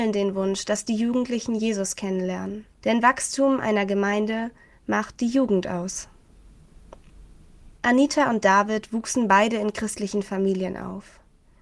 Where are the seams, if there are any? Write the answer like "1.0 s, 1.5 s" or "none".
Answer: 2.7 s, 7.8 s